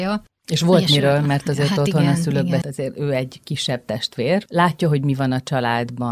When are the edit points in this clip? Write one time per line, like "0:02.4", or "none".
0:02.6
0:04.5